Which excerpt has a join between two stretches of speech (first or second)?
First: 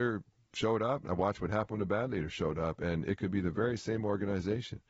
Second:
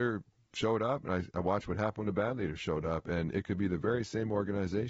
first